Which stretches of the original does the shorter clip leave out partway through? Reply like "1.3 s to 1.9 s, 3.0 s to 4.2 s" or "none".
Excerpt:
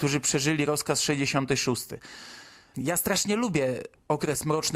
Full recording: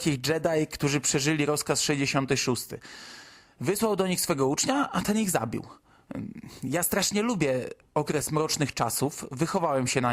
3.5 s to 6.6 s